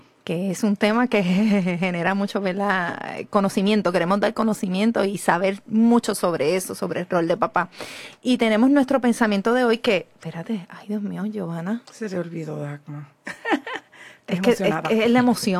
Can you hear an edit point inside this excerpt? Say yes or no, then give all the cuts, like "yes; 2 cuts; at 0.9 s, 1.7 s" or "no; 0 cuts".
no; 0 cuts